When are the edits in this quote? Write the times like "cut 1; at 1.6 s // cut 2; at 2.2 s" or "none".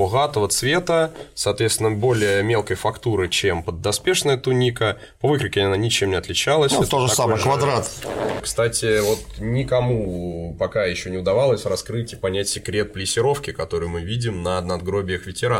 cut 1; at 8.4 s